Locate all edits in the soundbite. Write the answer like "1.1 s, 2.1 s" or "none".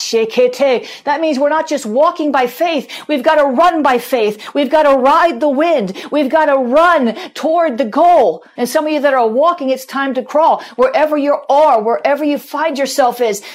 8.6 s